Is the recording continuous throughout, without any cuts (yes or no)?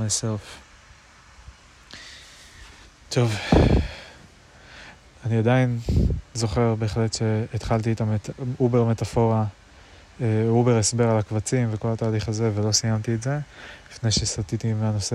yes